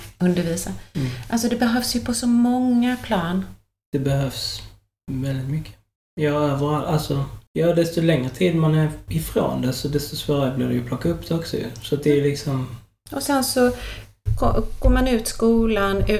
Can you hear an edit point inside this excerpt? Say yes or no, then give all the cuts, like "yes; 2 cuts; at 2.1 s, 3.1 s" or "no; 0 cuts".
no; 0 cuts